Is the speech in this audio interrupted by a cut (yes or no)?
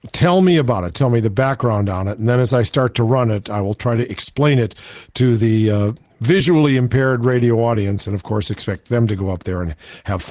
no